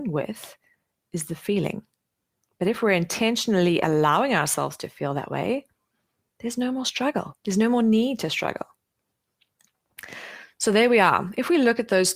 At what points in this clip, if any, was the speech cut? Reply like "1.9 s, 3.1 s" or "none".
7.4 s